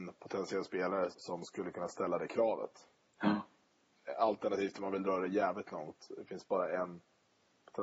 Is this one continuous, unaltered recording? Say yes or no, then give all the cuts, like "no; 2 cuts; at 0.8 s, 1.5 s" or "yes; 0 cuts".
no; 1 cut; at 1.1 s